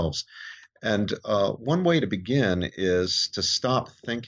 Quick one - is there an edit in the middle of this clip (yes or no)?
no